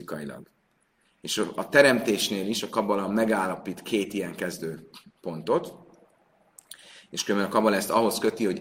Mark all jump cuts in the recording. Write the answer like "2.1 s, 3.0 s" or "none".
none